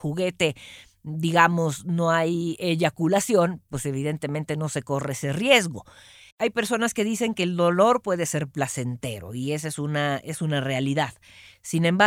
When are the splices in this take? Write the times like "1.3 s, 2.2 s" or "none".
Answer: 6.3 s